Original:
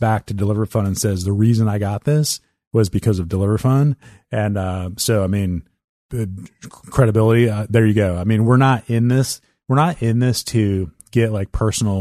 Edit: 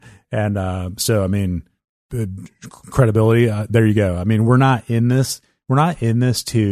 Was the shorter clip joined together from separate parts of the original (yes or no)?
no